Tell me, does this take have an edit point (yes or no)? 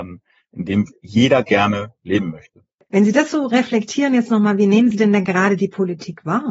yes